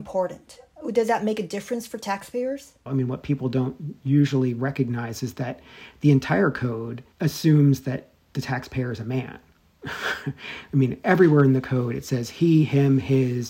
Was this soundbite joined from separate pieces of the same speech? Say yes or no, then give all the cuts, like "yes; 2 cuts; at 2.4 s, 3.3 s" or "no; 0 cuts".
yes; 2 cuts; at 2.9 s, 7.1 s